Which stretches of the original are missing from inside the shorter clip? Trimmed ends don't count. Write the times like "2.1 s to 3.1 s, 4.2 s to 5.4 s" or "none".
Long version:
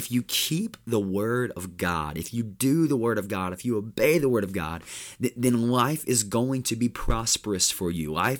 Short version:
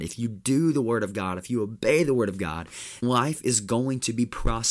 5.2 s to 5.7 s